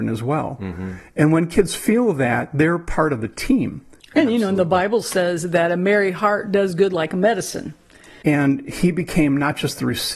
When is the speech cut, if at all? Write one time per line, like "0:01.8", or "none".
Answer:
0:04.0
0:08.2

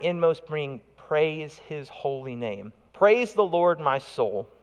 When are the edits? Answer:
0:02.9

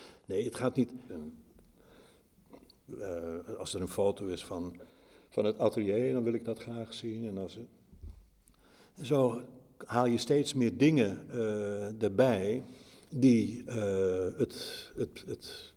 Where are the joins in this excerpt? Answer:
0:01.1

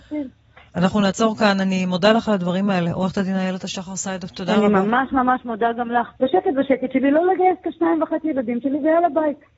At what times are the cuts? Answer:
0:06.2

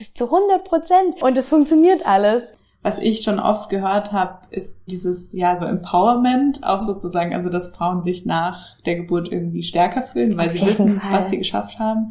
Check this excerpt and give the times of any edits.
0:04.9

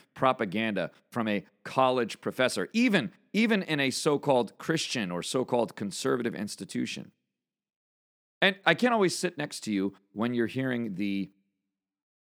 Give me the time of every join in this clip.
0:08.6

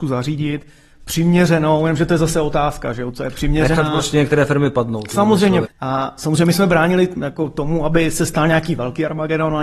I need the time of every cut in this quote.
0:05.6

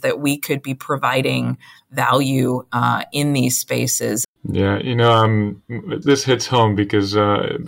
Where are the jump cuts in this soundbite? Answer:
0:04.2
0:06.0

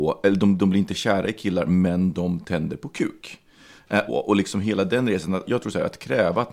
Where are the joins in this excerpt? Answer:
0:04.1
0:05.5

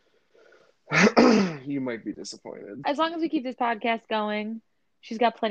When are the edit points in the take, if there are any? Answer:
0:02.8

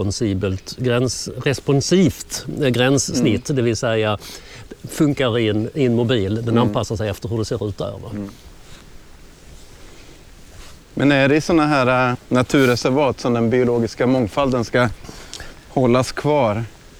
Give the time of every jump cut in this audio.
0:10.8
0:12.1

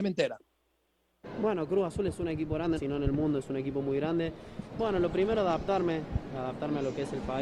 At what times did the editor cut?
0:02.8
0:04.7

